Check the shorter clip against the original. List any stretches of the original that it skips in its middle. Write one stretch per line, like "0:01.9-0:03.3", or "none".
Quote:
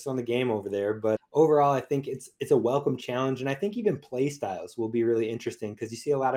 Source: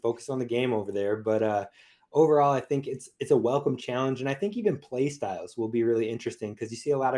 0:01.4-0:02.0